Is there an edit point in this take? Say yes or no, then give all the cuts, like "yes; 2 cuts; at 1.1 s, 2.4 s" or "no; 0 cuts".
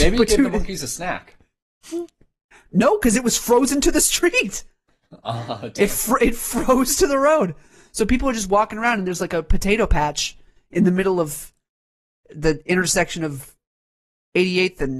no; 0 cuts